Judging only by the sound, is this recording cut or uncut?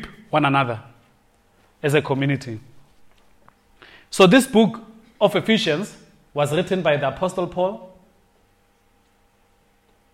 uncut